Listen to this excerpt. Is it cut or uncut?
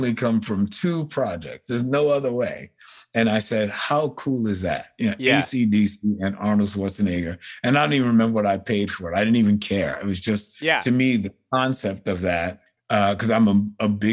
uncut